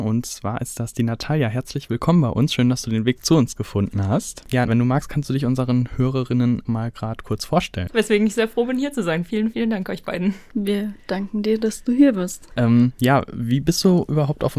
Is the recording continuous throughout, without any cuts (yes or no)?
no